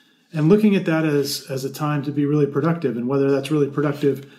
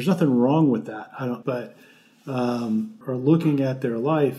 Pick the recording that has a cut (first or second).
second